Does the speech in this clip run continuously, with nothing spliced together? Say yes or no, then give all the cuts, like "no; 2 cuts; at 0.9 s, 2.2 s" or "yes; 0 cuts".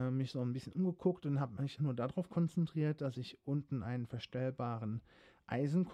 no; 1 cut; at 1.8 s